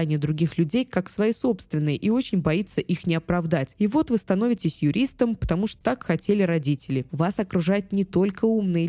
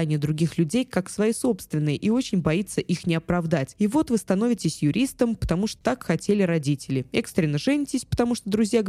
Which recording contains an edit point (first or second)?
first